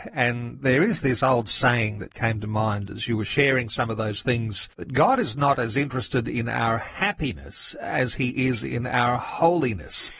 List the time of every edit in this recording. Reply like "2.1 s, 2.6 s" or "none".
4.7 s

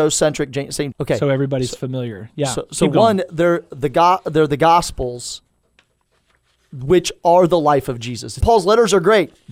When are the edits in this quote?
0.9 s, 8.4 s

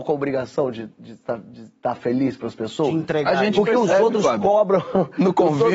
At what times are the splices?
none

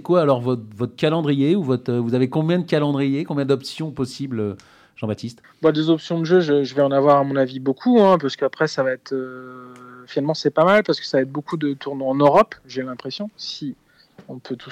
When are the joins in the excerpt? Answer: none

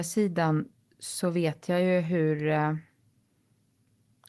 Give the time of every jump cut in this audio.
none

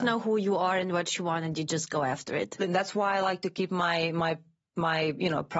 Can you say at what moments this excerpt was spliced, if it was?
2.6 s

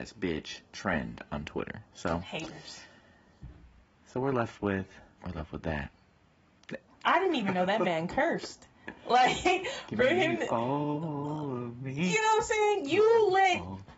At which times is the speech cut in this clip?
5.2 s, 6.9 s

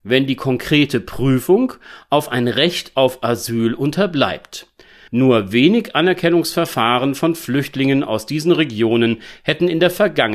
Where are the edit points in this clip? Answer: 5.1 s

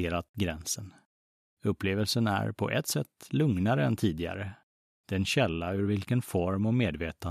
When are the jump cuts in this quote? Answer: 1.5 s, 4.9 s

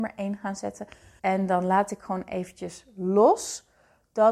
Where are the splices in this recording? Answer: 1.2 s

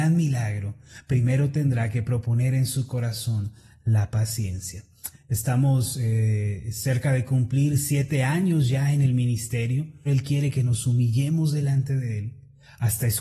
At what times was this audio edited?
5.1 s, 10.1 s

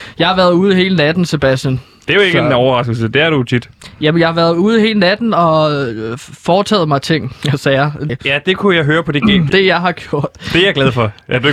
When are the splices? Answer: 8.1 s, 9.5 s

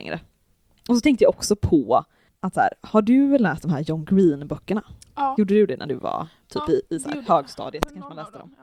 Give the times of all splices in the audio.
none

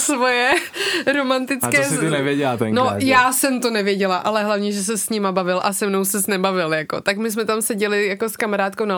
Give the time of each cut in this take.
none

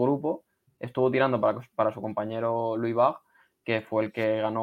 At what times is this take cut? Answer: none

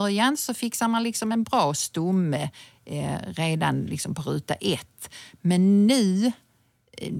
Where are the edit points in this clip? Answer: none

